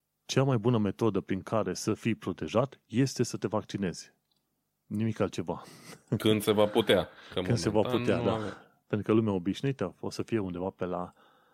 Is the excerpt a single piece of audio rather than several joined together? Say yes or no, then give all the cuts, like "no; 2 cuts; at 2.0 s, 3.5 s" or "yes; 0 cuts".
yes; 0 cuts